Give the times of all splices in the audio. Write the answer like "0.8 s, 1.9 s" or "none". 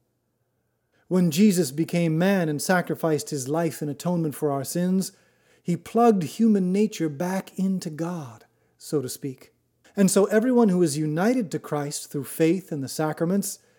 0.9 s, 9.8 s